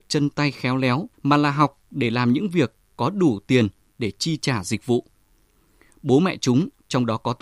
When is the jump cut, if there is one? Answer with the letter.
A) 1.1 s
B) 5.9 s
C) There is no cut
A